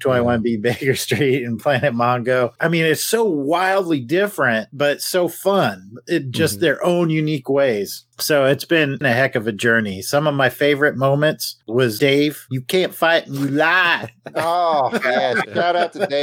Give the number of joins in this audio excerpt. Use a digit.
0